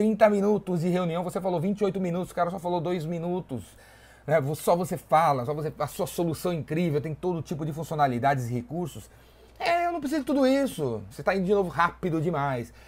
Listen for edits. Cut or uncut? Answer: cut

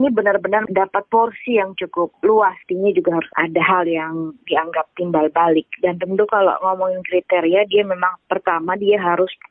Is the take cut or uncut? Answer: uncut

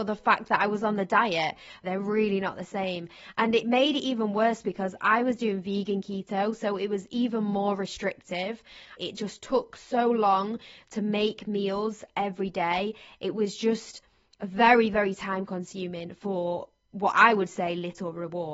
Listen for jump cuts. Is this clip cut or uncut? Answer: cut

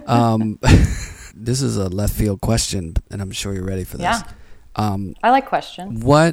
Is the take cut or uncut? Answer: cut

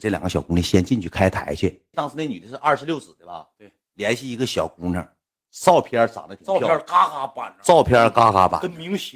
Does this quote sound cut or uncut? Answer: cut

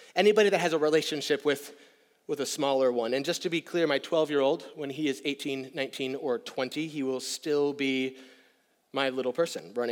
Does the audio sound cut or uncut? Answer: uncut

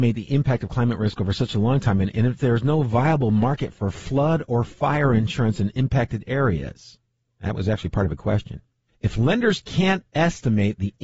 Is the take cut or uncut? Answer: cut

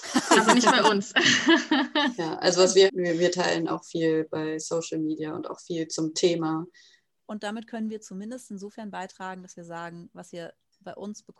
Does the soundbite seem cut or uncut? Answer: cut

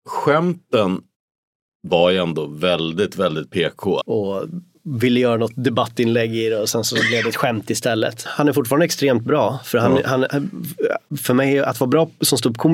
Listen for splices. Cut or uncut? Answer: cut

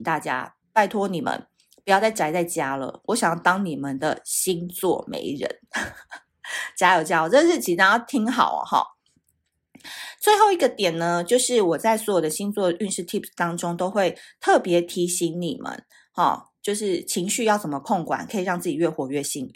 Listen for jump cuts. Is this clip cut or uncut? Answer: uncut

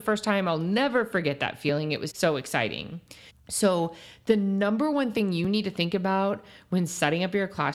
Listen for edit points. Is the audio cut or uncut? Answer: cut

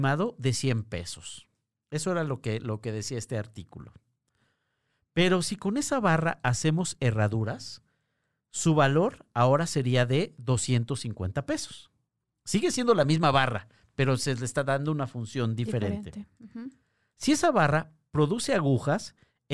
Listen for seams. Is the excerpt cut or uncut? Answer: uncut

